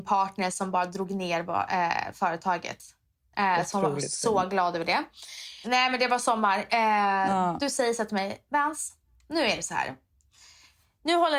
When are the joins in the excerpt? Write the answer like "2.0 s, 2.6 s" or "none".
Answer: 5.6 s